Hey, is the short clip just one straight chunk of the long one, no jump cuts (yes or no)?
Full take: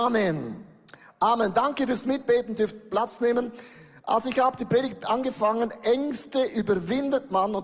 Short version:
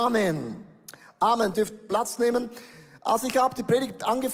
no